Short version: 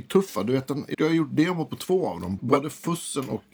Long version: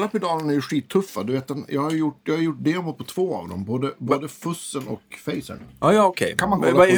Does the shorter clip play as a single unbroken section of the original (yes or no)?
no